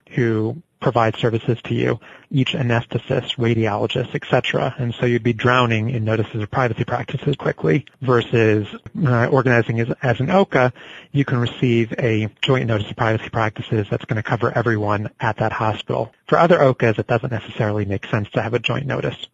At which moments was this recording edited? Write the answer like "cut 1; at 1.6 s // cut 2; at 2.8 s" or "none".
cut 1; at 7.4 s